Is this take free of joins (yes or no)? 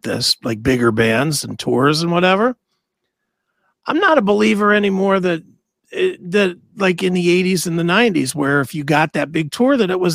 yes